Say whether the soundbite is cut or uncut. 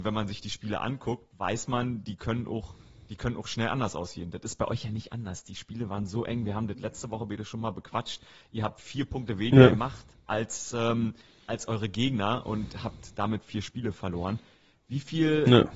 uncut